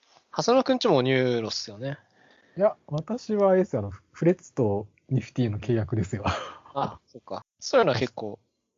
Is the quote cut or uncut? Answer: cut